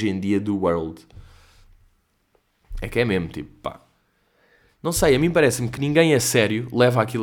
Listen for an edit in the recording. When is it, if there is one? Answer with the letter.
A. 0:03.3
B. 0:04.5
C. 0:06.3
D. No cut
D